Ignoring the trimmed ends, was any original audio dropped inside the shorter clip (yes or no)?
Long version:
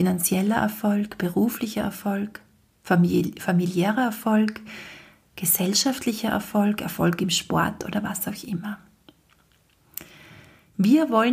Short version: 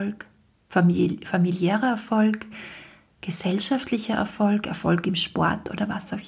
no